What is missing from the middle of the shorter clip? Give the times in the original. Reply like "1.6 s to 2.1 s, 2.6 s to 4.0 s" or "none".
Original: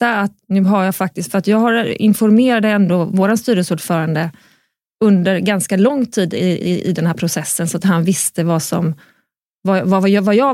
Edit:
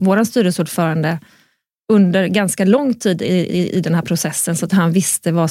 none